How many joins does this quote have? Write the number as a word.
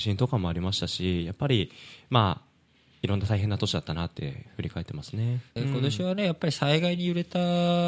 one